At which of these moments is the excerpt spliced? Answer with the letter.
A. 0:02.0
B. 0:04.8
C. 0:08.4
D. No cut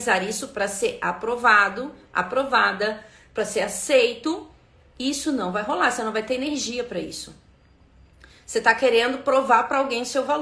D